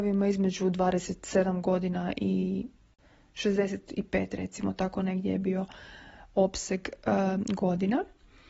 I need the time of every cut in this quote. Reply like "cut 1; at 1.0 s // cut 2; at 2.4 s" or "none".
none